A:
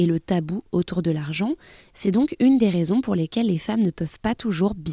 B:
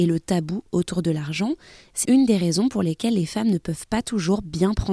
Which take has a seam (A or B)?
B